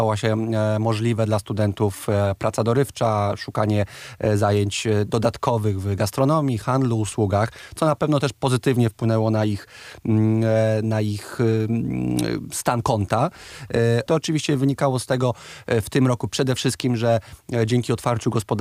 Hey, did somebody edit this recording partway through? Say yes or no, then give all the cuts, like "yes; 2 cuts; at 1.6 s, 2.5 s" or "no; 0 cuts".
yes; 1 cut; at 14.1 s